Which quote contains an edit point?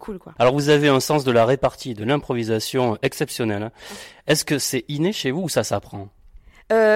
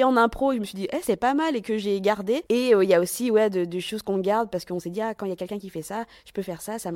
second; 1 cut; at 2.5 s

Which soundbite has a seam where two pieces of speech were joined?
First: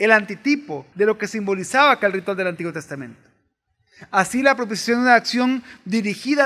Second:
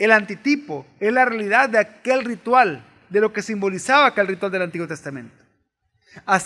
first; 1 cut; at 0.9 s

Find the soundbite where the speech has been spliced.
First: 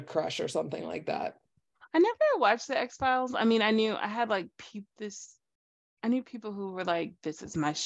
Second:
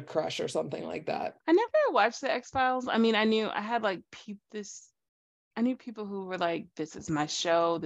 second; 1 cut; at 1.4 s

